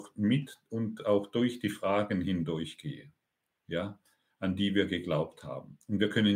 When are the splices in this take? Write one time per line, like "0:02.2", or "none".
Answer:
0:04.3

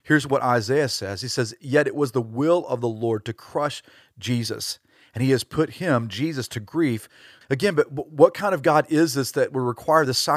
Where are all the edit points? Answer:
0:07.4

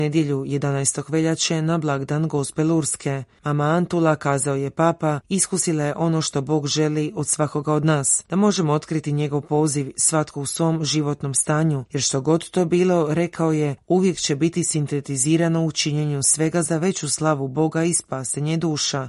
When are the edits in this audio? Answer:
none

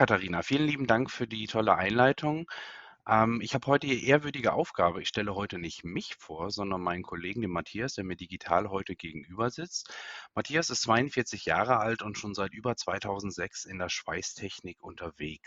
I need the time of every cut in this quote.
none

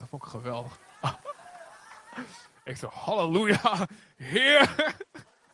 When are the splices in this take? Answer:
none

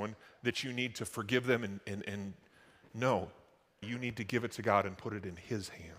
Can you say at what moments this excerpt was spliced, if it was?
0:03.8

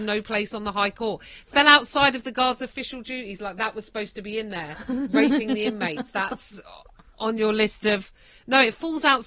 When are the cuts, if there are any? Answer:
none

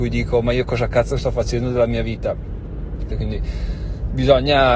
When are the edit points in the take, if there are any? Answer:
0:03.1

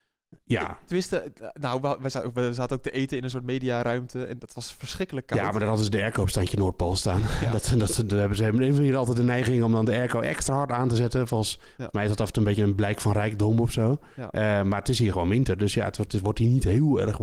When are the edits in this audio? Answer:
none

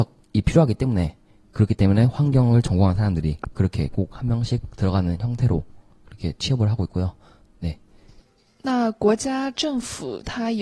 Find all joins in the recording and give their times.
none

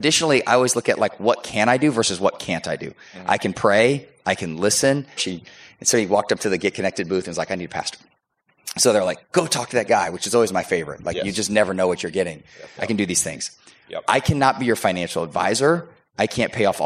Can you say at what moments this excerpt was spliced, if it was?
0:05.2
0:12.8

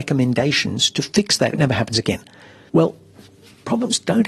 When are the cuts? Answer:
0:01.5

